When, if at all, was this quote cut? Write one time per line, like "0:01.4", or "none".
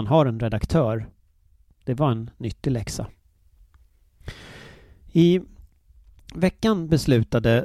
none